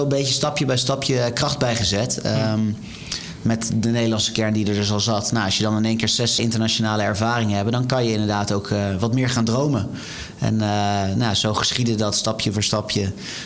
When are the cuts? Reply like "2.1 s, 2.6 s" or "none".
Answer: 6.4 s